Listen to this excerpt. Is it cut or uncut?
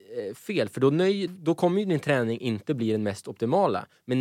cut